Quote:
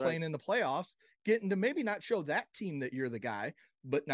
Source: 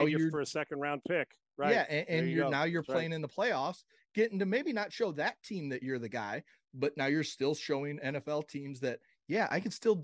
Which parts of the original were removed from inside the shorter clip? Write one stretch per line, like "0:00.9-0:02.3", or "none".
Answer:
none